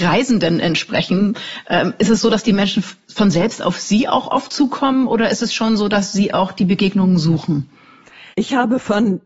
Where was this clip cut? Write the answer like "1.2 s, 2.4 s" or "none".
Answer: 8.3 s